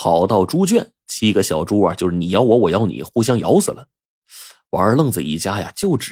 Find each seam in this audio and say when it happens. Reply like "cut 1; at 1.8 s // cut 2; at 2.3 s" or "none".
none

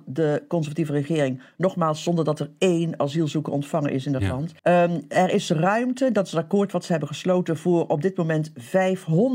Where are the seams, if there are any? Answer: cut 1; at 4.6 s

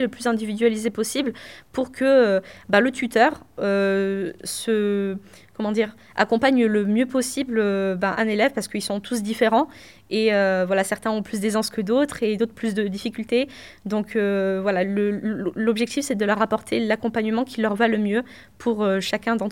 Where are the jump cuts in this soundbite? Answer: none

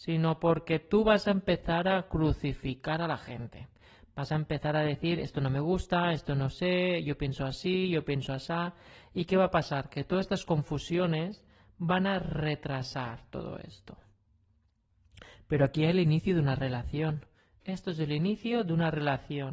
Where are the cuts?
none

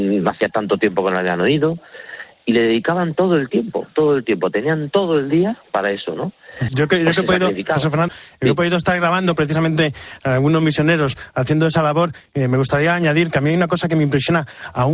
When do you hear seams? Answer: cut 1; at 6.7 s // cut 2; at 8.1 s

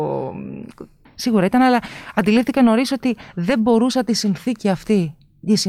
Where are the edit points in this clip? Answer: cut 1; at 1.1 s

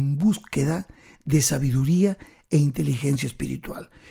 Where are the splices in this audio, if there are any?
none

